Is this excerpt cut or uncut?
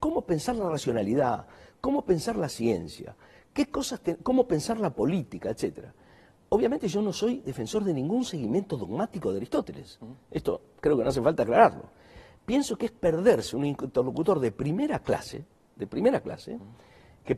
uncut